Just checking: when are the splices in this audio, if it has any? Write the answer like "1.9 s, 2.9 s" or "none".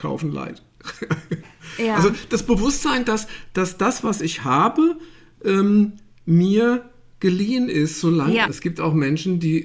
8.5 s